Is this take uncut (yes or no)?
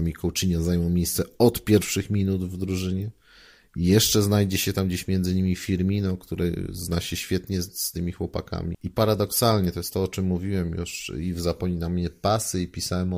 no